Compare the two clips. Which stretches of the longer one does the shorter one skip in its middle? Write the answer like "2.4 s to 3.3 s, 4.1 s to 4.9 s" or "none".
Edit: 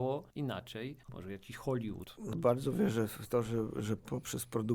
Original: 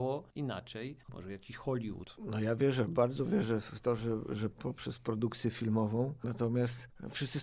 2.3 s to 2.9 s